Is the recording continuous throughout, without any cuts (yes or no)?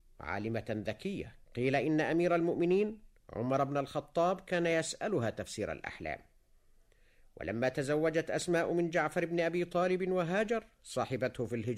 no